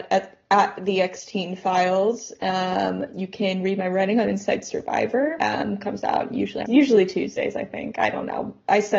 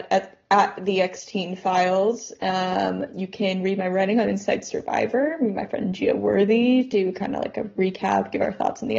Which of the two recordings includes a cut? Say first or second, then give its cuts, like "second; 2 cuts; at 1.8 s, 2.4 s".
first; 2 cuts; at 5.4 s, 6.6 s